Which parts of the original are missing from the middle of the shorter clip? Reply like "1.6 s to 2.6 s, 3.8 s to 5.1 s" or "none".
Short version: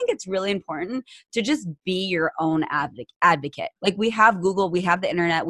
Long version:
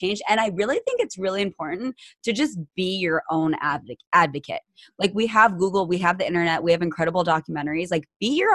4.7 s to 4.9 s